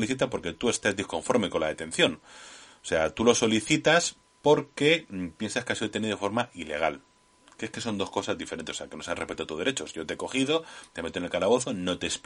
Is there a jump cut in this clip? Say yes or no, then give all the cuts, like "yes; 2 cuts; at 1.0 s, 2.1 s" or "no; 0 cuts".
yes; 1 cut; at 10.9 s